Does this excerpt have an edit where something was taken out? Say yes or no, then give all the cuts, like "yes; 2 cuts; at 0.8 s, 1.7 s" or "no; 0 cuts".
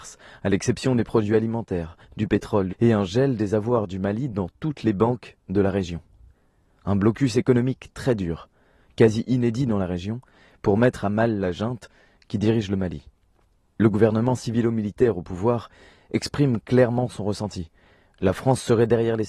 yes; 1 cut; at 2.7 s